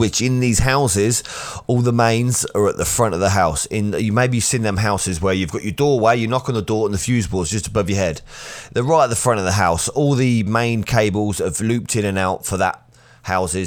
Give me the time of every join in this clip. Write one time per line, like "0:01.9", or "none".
none